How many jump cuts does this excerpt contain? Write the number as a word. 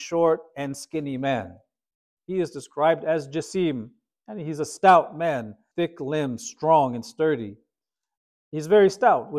two